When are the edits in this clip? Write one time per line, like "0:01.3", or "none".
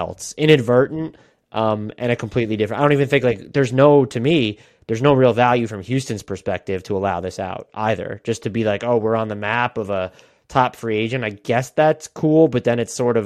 none